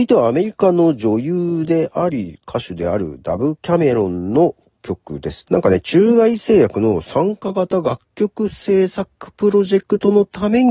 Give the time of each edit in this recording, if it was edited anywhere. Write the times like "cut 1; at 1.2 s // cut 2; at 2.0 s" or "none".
cut 1; at 5.4 s